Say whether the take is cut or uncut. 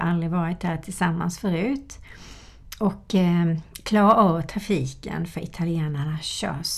uncut